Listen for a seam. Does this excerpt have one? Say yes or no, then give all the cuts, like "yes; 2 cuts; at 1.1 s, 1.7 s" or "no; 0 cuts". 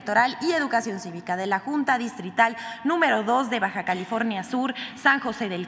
no; 0 cuts